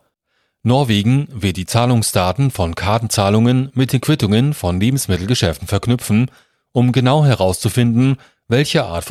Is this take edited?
no; 0 cuts

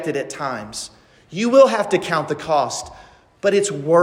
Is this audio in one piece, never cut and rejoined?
yes; 0 cuts

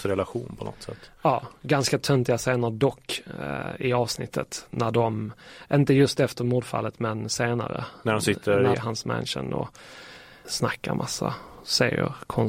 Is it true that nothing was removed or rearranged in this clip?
no; 2 cuts; at 8.7 s, 10.4 s

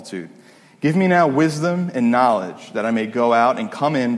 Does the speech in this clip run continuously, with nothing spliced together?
yes; 0 cuts

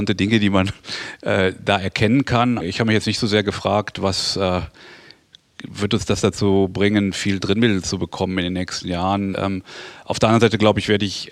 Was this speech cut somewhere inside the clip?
yes; 2 cuts; at 2.6 s, 9.3 s

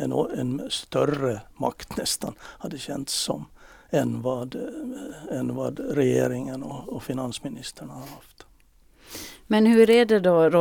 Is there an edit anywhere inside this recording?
no; 0 cuts

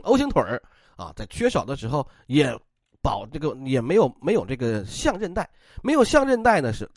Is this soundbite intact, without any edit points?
yes; 0 cuts

